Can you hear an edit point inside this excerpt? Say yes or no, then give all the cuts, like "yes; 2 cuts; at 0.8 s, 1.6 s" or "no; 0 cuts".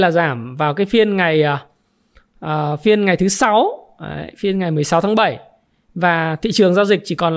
no; 0 cuts